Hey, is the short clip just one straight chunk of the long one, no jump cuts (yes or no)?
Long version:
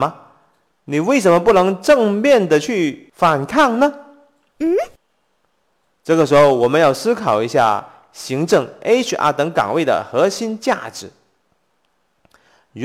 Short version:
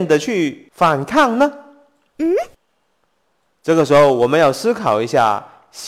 yes